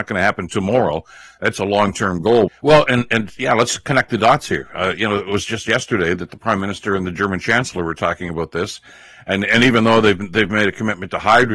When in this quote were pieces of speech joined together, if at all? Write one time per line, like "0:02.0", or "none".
0:02.5